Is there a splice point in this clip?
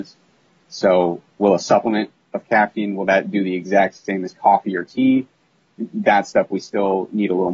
no; 0 cuts

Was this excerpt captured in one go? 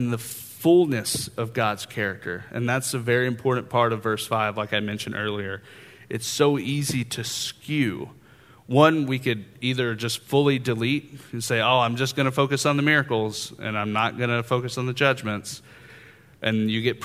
yes; 0 cuts

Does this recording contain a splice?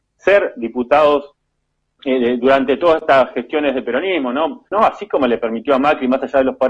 yes; 1 cut; at 4.7 s

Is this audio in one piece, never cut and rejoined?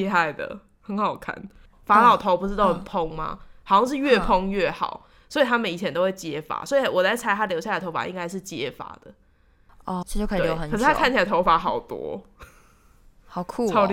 no; 2 cuts; at 1.7 s, 10.0 s

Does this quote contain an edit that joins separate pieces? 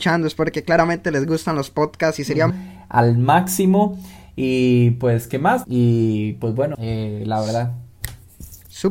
yes; 3 cuts; at 2.5 s, 5.6 s, 6.7 s

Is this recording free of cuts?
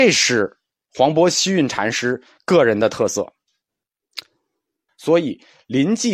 no; 1 cut; at 4.9 s

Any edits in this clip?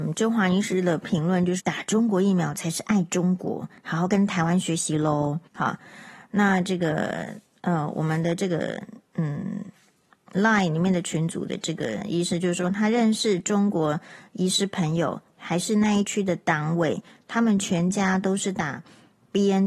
yes; 2 cuts; at 1.6 s, 5.5 s

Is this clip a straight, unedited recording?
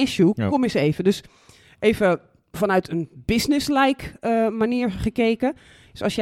yes; 0 cuts

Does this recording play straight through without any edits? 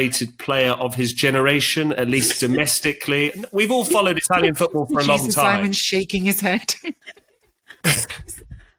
yes; 0 cuts

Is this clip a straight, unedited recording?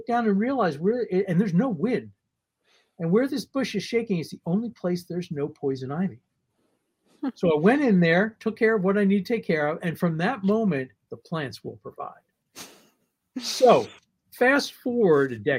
no; 1 cut; at 11.1 s

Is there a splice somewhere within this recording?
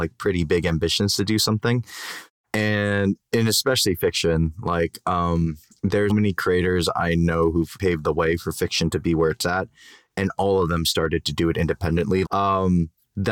yes; 3 cuts; at 6.1 s, 7.8 s, 12.2 s

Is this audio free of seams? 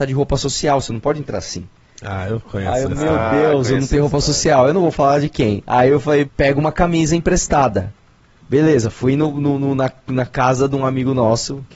no; 1 cut; at 6.2 s

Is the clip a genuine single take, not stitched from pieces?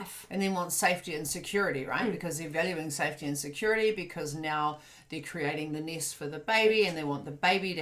yes; 0 cuts

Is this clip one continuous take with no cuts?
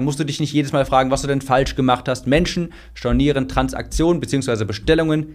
yes; 0 cuts

